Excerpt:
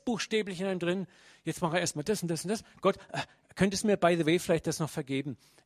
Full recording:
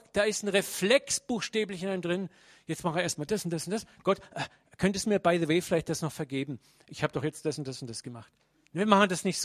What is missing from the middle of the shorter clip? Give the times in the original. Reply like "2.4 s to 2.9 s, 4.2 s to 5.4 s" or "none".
none